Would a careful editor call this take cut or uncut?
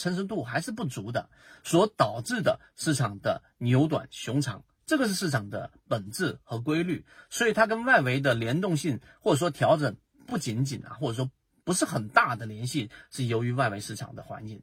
uncut